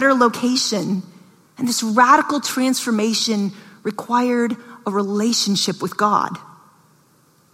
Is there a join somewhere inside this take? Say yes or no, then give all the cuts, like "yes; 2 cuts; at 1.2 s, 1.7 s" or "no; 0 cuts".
yes; 1 cut; at 1.5 s